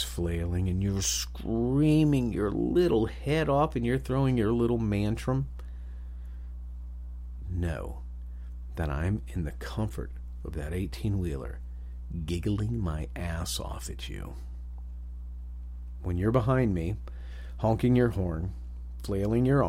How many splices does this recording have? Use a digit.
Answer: 2